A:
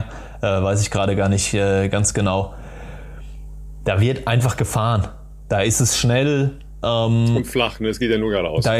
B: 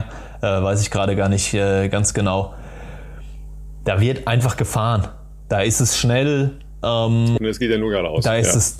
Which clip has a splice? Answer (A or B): B